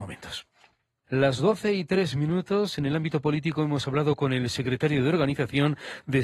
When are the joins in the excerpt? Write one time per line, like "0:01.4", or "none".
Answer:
0:01.0